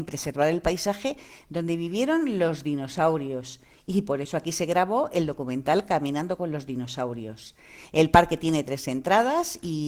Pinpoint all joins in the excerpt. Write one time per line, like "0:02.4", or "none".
none